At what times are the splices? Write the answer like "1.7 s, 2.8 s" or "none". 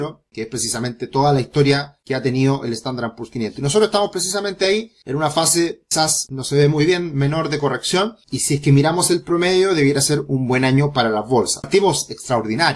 none